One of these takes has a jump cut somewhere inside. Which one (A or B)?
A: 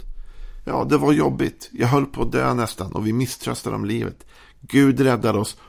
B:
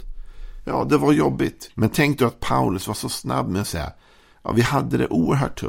B